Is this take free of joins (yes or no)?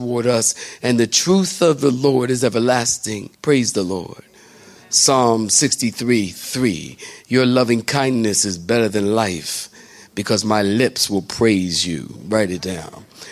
no